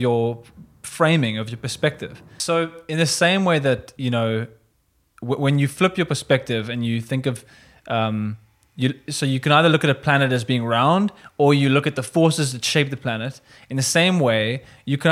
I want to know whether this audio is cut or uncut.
uncut